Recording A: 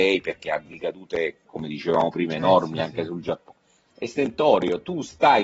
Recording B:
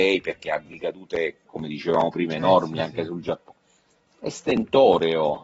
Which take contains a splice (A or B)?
A